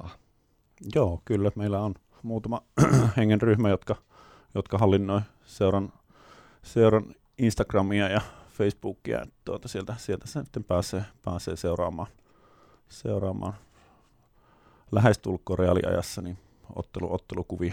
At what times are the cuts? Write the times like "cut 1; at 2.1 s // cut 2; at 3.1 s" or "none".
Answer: cut 1; at 2.2 s

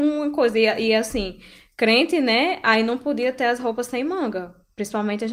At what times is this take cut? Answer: none

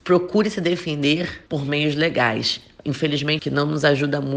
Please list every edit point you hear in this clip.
cut 1; at 1.5 s // cut 2; at 3.4 s

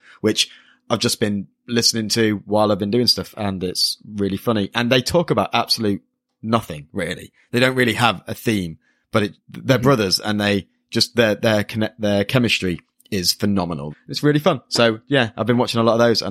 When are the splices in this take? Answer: cut 1; at 9.4 s // cut 2; at 13.9 s

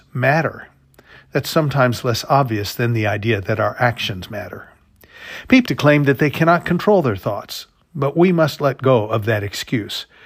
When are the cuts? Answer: cut 1; at 5.7 s

